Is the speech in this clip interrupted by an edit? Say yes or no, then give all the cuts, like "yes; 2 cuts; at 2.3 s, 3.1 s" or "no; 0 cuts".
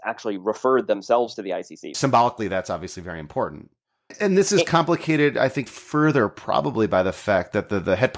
yes; 3 cuts; at 1.9 s, 4.1 s, 5.7 s